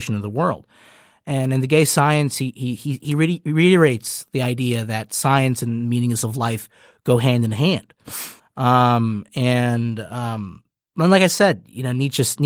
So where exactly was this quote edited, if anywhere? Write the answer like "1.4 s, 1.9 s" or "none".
8.4 s